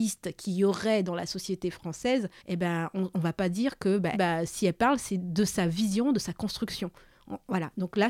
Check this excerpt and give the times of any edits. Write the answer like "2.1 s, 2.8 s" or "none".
2.4 s, 4.1 s